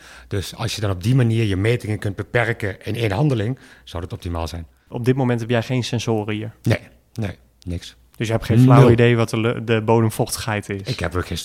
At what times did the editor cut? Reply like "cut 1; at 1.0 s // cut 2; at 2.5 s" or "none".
none